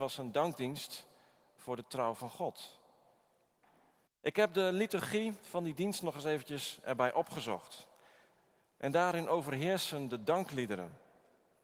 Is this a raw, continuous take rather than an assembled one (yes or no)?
no